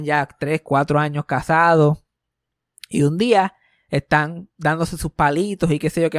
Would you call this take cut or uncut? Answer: uncut